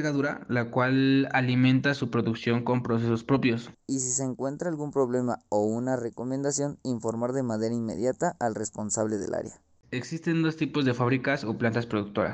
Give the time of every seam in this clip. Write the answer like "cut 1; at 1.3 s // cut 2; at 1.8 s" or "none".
cut 1; at 3.7 s // cut 2; at 9.8 s